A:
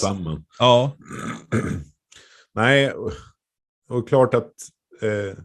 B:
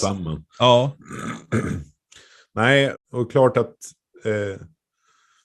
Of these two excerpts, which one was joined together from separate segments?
B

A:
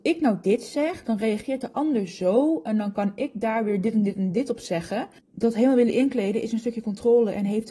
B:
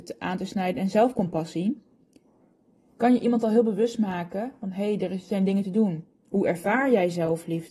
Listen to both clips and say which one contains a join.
A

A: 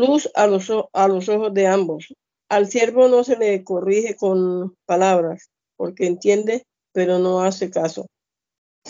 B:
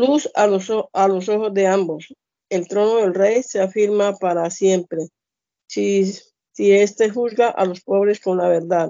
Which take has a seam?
A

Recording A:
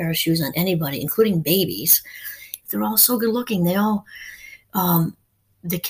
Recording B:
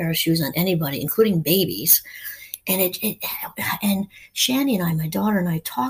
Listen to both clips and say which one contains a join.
A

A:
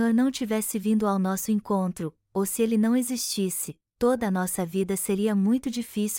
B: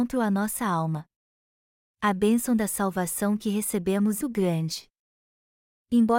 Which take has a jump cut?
B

